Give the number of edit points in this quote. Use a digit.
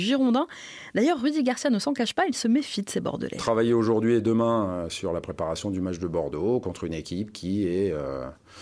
0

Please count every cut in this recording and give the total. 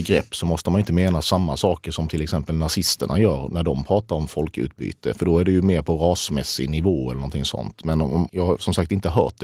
1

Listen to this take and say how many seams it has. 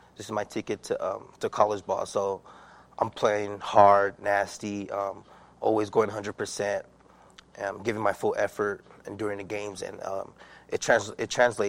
0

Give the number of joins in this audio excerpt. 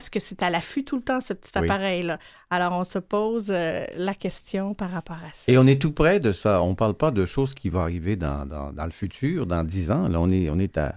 0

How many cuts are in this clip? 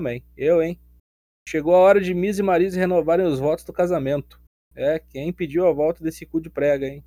2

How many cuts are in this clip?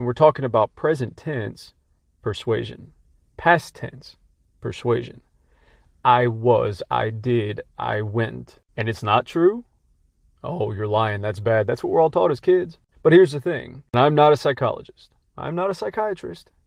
1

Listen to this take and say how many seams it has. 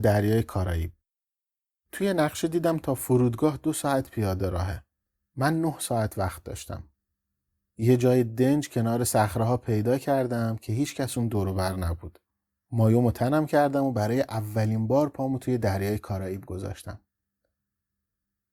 0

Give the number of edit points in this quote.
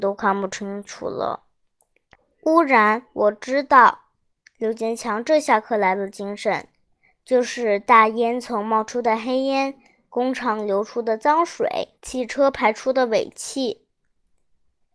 1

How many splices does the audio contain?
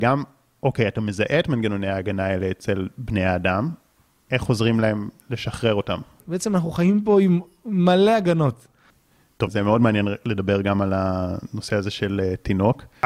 2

